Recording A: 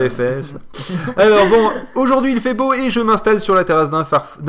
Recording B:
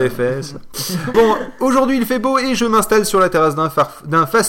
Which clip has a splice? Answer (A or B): B